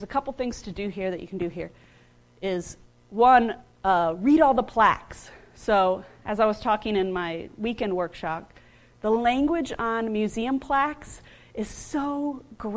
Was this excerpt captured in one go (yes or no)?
yes